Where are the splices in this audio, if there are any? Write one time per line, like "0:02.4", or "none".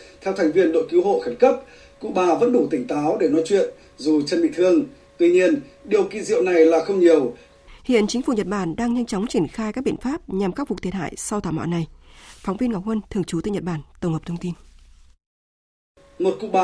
0:07.7